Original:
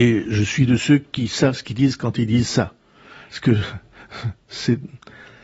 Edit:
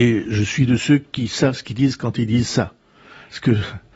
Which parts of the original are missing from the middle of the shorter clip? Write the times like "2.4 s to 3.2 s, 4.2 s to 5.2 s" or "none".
none